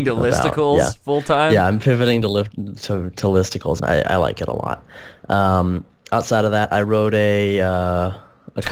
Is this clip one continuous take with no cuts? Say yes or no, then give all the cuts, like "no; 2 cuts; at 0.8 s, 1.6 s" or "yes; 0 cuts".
no; 1 cut; at 3.8 s